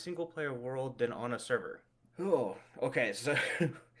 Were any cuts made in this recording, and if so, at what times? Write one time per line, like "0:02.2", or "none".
0:02.0